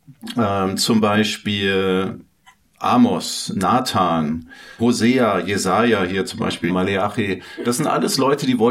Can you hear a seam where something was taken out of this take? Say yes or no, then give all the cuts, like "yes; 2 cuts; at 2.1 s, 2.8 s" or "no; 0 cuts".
yes; 2 cuts; at 4.8 s, 6.7 s